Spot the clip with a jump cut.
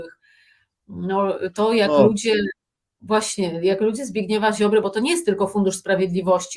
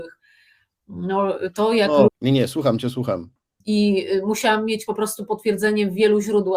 second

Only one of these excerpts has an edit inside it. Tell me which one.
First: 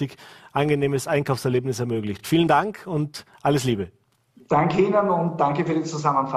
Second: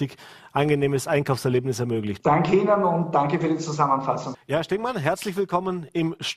second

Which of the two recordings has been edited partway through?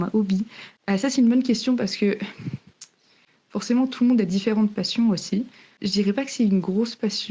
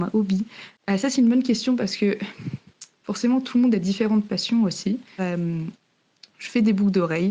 second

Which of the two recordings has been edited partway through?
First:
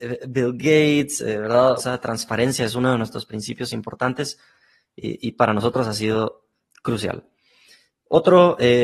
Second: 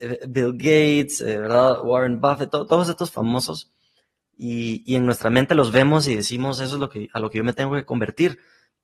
first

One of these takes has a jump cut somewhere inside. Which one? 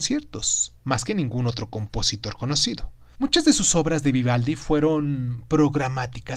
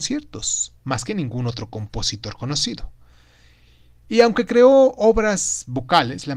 first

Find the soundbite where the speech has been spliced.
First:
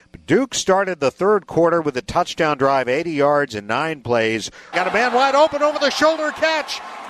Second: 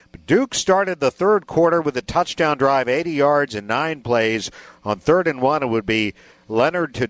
first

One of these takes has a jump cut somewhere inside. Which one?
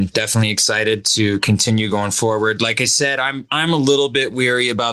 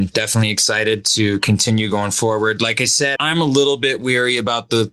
second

